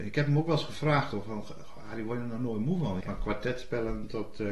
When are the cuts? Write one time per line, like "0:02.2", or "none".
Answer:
0:03.0